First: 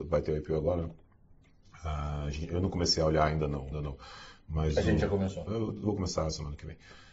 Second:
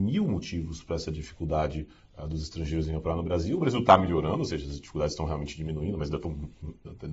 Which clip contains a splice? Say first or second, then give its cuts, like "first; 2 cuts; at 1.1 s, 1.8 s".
first; 2 cuts; at 3.7 s, 5.5 s